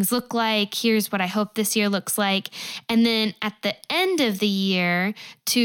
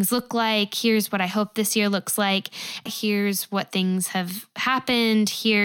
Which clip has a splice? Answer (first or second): second